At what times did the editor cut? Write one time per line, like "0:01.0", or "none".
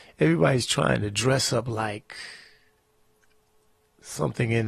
none